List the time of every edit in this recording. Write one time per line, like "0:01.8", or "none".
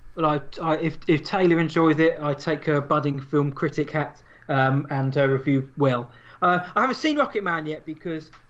none